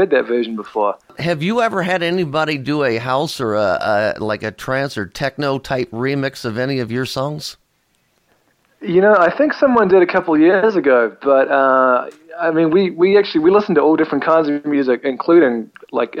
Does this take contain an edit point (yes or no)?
no